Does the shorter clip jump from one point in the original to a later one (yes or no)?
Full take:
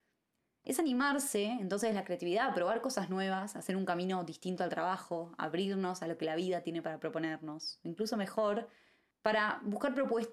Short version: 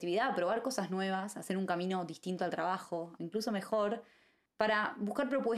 yes